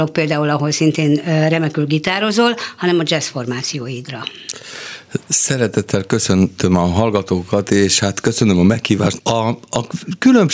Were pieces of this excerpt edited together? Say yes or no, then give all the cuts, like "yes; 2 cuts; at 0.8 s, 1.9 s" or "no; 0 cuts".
yes; 1 cut; at 9.2 s